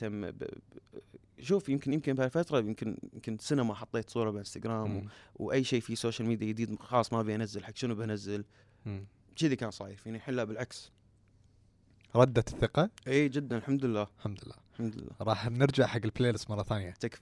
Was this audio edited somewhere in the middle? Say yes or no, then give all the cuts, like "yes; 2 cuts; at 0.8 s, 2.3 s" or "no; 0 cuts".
no; 0 cuts